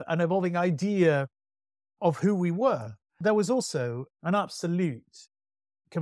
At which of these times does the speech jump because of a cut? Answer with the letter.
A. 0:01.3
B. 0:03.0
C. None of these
B